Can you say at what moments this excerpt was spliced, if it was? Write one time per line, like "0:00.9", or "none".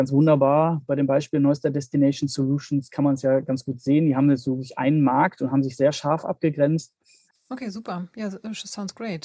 0:07.3